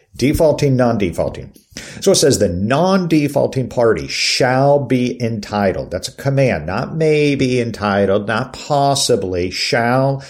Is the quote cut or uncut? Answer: uncut